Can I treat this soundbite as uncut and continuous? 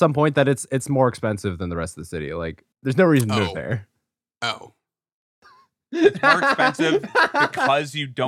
no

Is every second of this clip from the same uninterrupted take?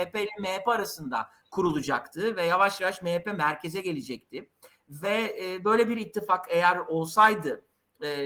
yes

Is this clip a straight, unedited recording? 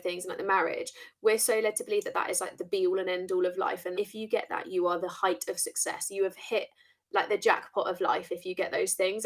no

